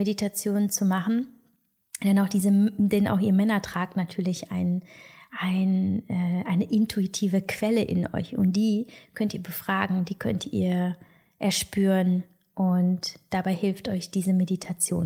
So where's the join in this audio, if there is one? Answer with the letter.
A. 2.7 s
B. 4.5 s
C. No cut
C